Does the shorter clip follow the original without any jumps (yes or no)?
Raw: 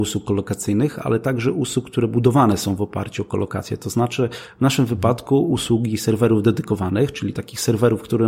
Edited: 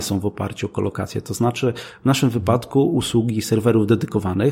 yes